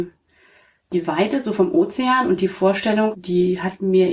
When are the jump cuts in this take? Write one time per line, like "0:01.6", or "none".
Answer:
0:03.1